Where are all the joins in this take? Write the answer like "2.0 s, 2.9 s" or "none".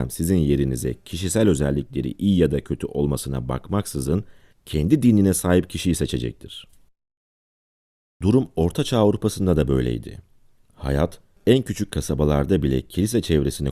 none